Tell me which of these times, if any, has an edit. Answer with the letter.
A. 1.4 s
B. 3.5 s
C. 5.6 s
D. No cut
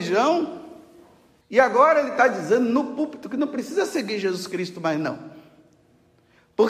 A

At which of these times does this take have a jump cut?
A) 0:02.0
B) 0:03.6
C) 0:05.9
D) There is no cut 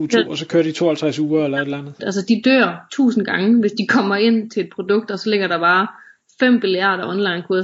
A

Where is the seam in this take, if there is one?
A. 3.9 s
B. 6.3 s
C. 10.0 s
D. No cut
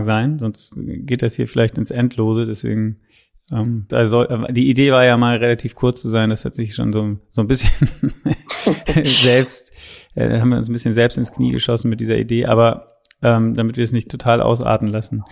A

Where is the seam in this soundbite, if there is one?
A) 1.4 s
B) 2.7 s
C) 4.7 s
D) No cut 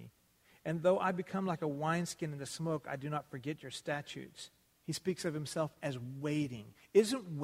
C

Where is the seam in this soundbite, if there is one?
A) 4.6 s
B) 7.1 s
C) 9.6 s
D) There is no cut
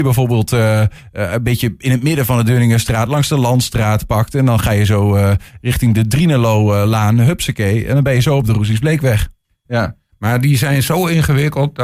C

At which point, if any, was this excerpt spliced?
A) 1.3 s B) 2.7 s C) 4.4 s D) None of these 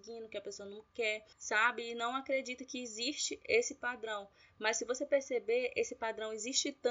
A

